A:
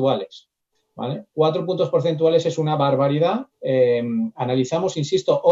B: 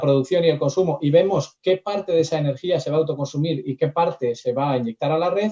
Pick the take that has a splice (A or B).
A